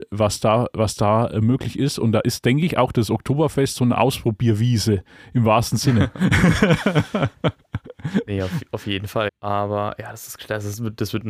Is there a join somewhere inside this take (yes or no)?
yes